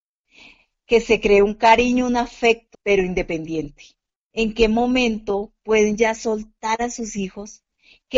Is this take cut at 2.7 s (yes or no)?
yes